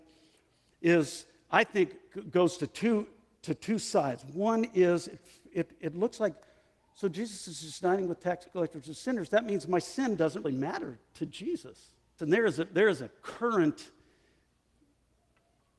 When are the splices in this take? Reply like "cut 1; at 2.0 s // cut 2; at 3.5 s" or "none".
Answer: cut 1; at 10.4 s // cut 2; at 12.2 s